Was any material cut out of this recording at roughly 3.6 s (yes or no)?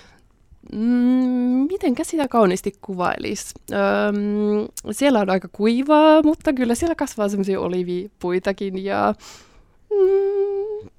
no